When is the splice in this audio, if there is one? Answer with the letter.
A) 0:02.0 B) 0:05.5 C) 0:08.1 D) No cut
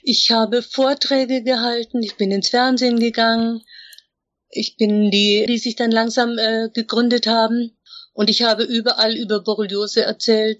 B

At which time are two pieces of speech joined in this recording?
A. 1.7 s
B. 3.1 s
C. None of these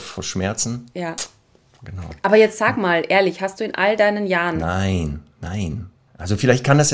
C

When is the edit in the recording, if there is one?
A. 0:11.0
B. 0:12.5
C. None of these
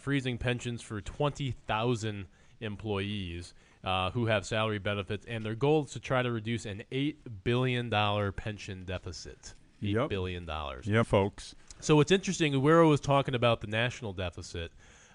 A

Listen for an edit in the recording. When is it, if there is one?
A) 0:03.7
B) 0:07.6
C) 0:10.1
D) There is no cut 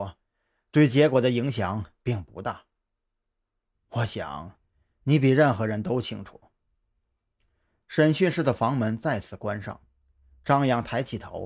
A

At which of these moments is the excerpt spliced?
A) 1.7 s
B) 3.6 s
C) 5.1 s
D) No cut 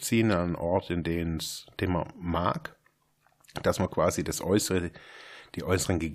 D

